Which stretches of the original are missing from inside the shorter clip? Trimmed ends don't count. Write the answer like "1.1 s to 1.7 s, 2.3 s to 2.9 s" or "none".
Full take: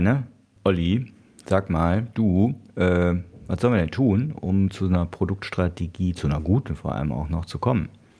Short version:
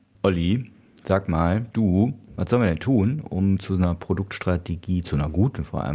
2.7 s to 3.4 s

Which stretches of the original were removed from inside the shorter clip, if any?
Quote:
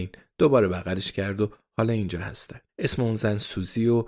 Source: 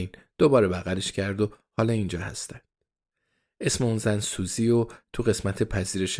2.7 s to 3.5 s

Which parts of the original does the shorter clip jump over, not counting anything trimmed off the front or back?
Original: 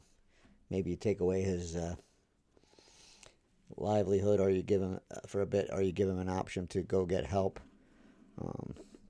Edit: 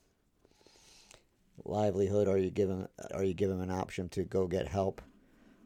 5.2 s to 5.7 s

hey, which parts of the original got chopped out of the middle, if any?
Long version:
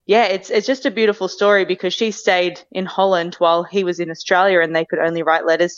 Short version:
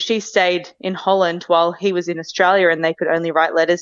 none

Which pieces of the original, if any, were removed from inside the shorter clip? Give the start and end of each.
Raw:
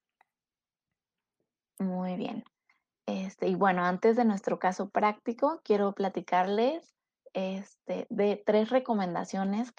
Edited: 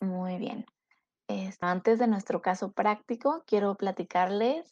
3.4 s to 3.8 s

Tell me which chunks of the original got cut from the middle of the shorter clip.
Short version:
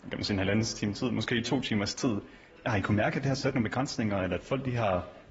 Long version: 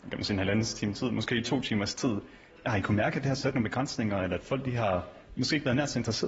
none

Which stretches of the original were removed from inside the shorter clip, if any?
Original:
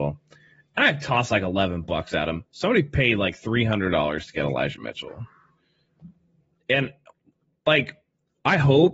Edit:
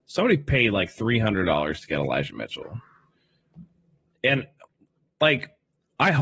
none

